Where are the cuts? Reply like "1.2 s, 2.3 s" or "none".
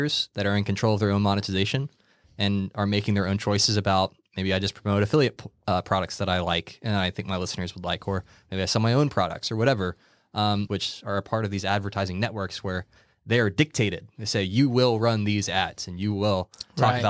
10.7 s